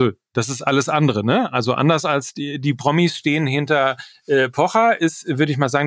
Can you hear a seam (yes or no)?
no